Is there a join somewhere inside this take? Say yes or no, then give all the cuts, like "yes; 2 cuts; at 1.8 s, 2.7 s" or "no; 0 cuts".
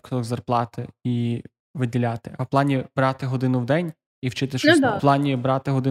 yes; 1 cut; at 5.0 s